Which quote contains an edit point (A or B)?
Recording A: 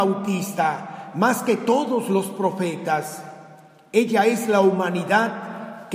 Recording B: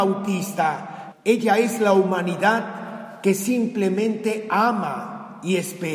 B